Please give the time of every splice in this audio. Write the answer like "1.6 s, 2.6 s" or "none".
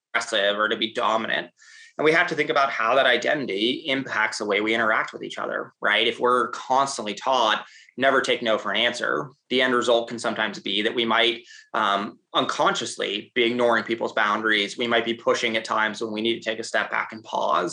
none

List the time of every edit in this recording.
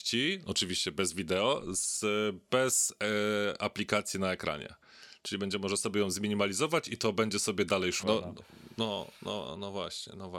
8.0 s

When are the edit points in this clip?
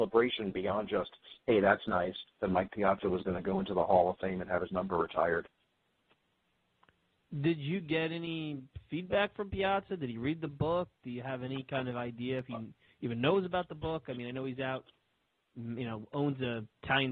none

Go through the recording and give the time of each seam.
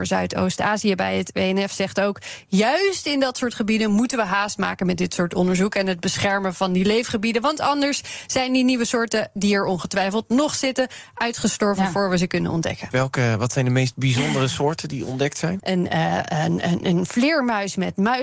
12.9 s, 15.6 s

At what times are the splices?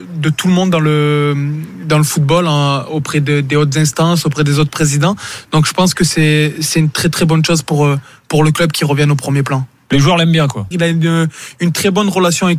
10.7 s

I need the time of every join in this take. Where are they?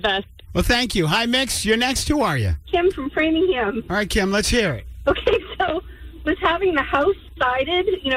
none

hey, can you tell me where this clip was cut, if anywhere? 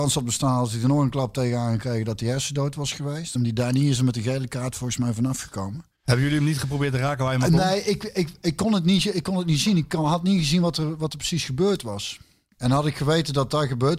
3.4 s

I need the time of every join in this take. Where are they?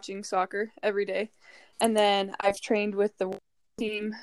1.7 s

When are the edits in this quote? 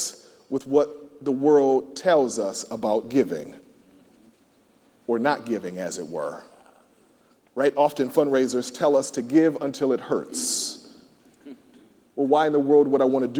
none

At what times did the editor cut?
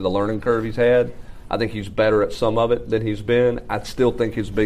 none

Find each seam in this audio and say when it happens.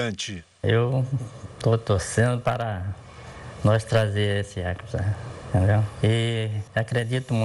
none

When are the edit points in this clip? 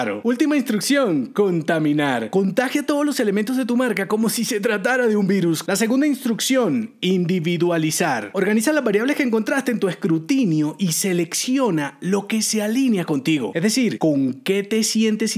5.7 s

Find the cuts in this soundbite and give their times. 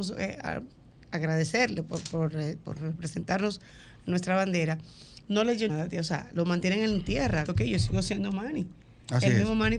5.7 s, 7.5 s

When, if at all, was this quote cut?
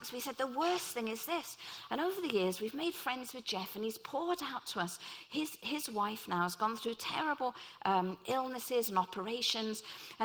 1.9 s

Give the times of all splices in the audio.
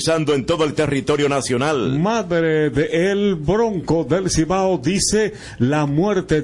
none

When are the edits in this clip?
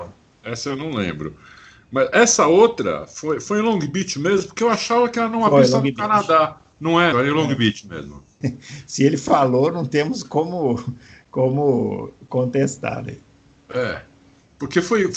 7.1 s, 8.4 s

